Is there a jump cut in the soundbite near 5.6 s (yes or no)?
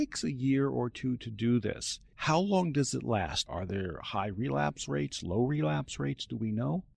no